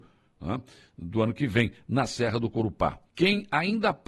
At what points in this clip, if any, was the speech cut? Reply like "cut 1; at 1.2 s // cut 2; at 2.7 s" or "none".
cut 1; at 3.1 s